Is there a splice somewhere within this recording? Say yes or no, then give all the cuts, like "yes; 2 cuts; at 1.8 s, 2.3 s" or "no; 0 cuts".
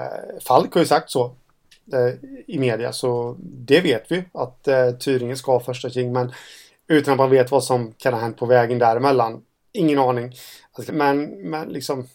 yes; 1 cut; at 10.9 s